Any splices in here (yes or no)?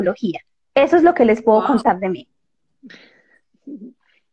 no